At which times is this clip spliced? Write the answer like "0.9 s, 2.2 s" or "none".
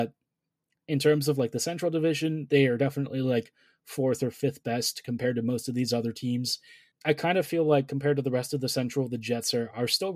6.9 s